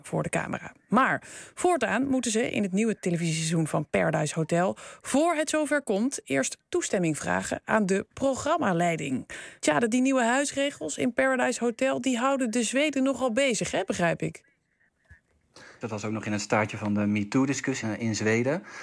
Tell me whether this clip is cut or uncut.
cut